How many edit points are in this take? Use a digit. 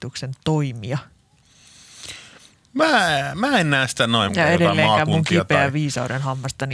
1